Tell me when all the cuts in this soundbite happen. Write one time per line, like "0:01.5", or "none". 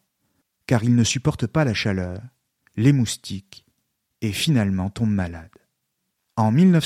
none